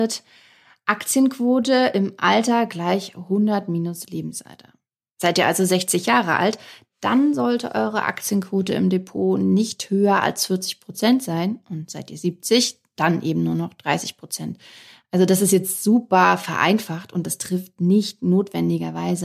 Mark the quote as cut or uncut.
uncut